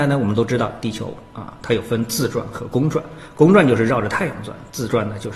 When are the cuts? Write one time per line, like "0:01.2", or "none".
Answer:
none